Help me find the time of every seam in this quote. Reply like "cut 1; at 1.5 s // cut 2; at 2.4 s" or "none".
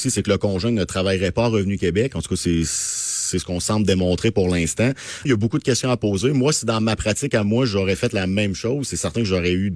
cut 1; at 5.3 s